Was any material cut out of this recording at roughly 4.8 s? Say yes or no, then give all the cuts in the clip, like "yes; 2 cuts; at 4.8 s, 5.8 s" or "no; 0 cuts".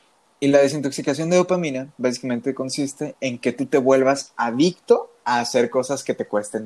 no; 0 cuts